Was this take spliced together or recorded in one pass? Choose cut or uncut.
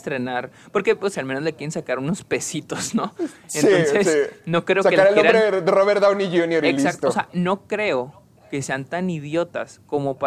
cut